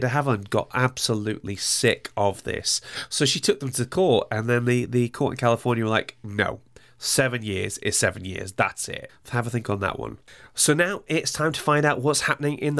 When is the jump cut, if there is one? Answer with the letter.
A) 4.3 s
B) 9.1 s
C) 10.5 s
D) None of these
B